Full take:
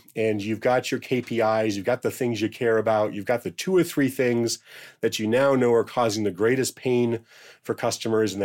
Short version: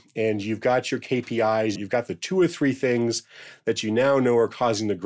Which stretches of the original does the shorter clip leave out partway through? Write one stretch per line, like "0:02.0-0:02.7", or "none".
0:01.8-0:03.1